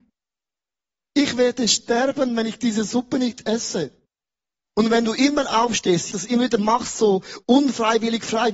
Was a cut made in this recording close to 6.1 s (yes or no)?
yes